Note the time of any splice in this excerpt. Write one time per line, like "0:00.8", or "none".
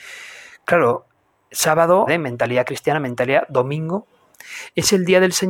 0:02.1